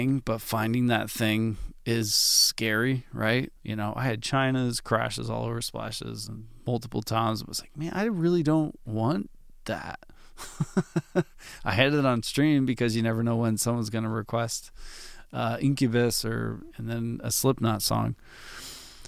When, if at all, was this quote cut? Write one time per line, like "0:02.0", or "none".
0:03.6